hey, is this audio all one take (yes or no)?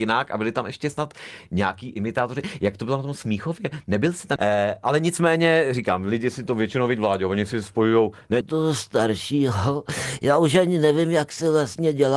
no